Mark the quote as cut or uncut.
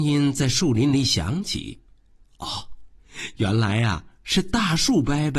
uncut